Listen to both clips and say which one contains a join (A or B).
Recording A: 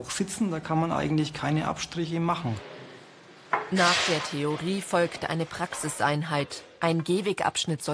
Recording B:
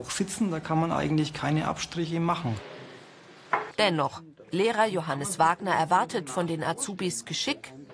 B